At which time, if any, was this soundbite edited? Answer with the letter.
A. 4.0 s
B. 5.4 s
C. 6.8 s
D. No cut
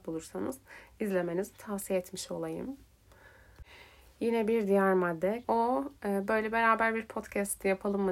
B